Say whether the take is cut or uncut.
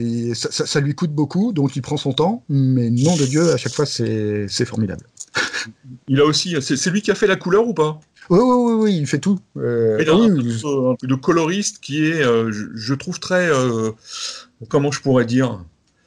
cut